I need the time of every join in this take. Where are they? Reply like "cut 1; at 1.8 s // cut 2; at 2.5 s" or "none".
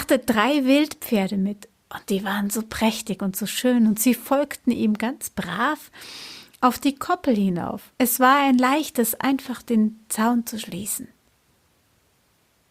cut 1; at 8.0 s

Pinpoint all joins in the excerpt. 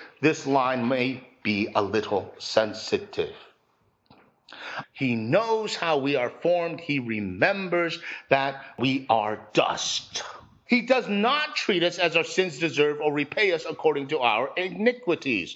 cut 1; at 4.8 s // cut 2; at 10.7 s

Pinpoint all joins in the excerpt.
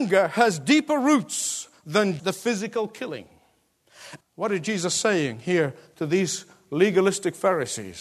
cut 1; at 2.2 s // cut 2; at 4.2 s

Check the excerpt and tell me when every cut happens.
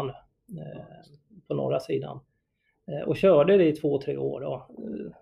none

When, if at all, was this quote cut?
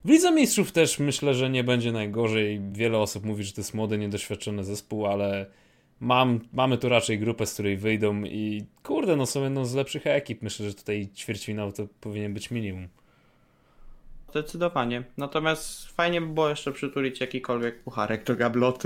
none

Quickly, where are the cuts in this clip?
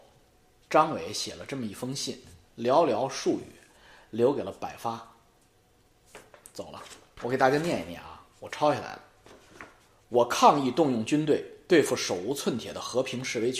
none

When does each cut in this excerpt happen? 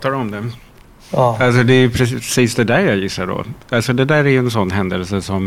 none

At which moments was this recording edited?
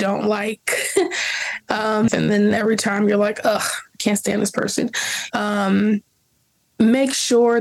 cut 1; at 2.1 s // cut 2; at 5.3 s

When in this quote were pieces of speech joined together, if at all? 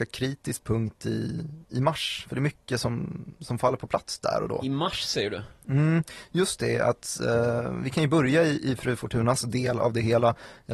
none

